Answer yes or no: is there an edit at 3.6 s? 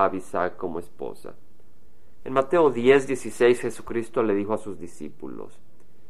no